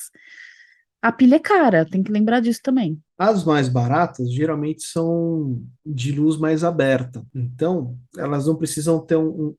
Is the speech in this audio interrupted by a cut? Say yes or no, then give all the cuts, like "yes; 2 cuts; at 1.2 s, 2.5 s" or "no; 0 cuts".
yes; 1 cut; at 3.1 s